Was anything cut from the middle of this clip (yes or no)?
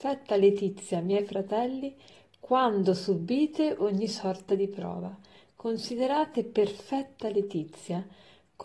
no